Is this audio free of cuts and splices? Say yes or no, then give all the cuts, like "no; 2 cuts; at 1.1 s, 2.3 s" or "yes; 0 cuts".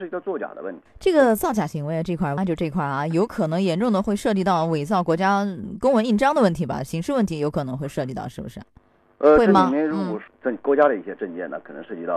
no; 1 cut; at 2.4 s